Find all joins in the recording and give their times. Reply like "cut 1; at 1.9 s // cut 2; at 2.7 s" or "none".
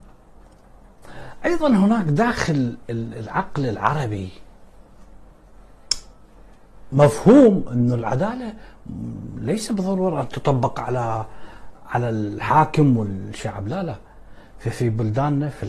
none